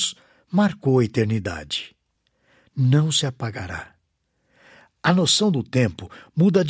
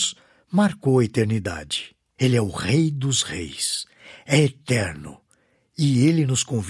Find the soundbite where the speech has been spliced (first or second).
second